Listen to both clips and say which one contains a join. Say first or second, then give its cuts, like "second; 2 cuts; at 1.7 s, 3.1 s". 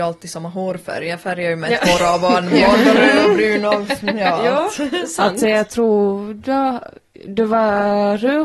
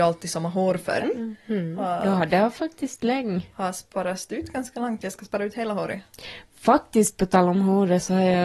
second; 1 cut; at 1.0 s